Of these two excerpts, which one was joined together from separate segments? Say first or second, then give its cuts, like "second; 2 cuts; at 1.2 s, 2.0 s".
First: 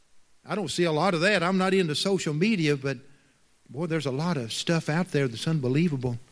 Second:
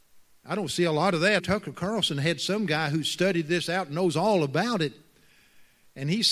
second; 1 cut; at 1.4 s